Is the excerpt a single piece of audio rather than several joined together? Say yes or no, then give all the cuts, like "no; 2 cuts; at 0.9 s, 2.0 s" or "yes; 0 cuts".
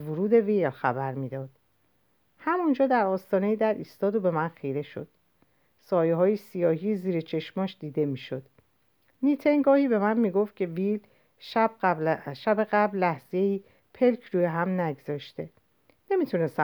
yes; 0 cuts